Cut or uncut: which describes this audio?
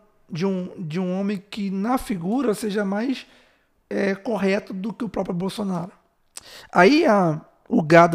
uncut